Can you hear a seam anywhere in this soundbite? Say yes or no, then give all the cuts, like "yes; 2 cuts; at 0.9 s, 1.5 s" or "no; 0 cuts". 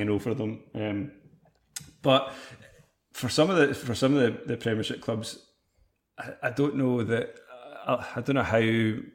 no; 0 cuts